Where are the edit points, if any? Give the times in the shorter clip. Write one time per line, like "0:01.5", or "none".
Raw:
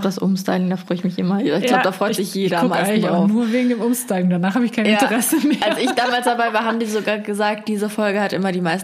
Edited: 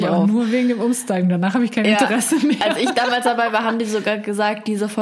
none